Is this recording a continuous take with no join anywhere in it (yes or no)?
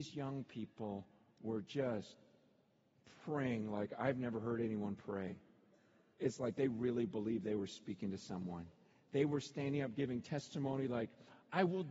yes